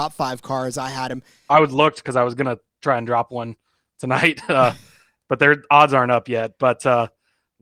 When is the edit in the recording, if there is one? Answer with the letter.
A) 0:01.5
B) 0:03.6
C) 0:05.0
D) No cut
A